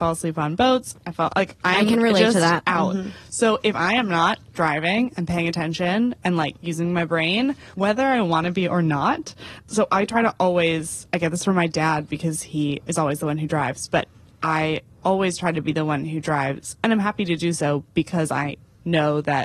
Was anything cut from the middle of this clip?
yes; 1 cut; at 7.7 s

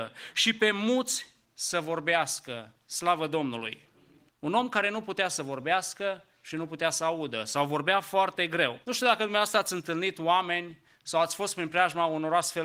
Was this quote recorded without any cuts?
no; 2 cuts; at 4.3 s, 8.8 s

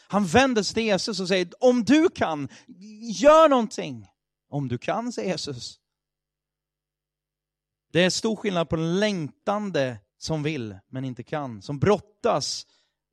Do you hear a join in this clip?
yes; 2 cuts; at 7.8 s, 10.1 s

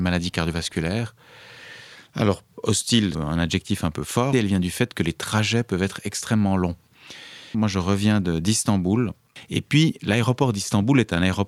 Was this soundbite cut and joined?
yes; 3 cuts; at 3.1 s, 4.3 s, 7.5 s

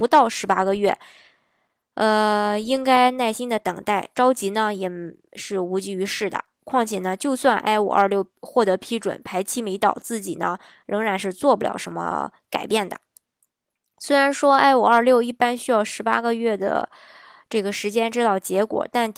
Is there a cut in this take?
no; 0 cuts

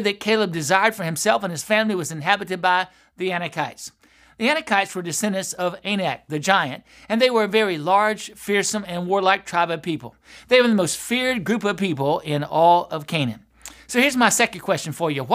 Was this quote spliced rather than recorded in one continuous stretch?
no; 0 cuts

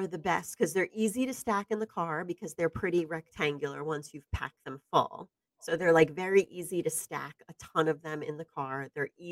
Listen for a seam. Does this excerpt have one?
no; 0 cuts

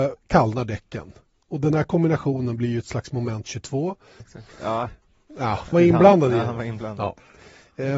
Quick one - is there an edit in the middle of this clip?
yes; 2 cuts; at 4.2 s, 5.7 s

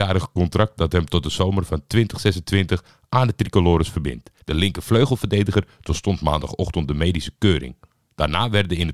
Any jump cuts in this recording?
yes; 1 cut; at 4.4 s

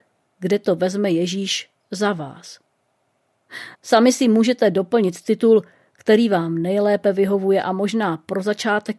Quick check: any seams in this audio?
yes; 1 cut; at 3.7 s

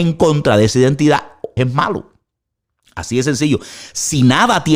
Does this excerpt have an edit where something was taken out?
yes; 1 cut; at 1.6 s

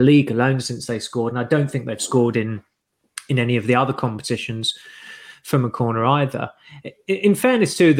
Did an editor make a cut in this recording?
no; 0 cuts

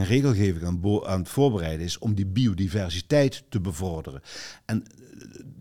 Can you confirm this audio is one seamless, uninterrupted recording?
yes; 0 cuts

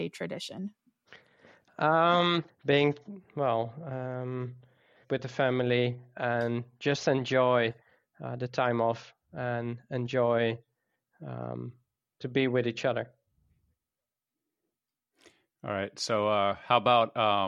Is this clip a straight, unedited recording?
no; 2 cuts; at 2.5 s, 5.0 s

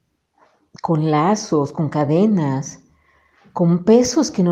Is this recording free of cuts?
yes; 0 cuts

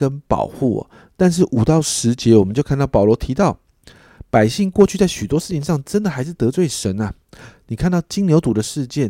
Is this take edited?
no; 0 cuts

